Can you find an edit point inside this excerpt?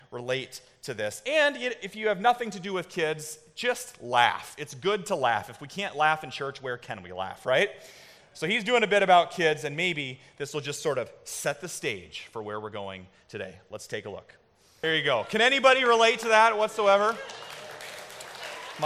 no; 0 cuts

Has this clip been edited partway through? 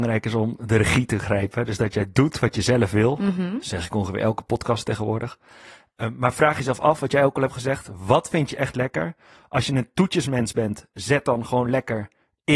no; 0 cuts

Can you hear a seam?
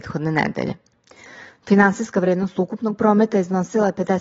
no; 0 cuts

